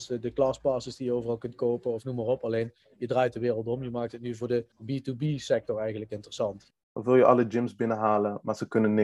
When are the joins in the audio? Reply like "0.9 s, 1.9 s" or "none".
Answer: 4.7 s, 6.7 s